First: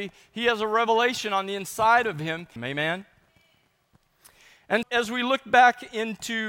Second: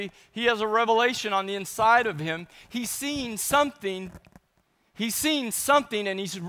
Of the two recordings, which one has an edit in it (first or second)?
first